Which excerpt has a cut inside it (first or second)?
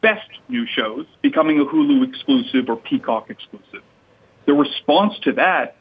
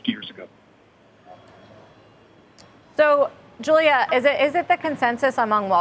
first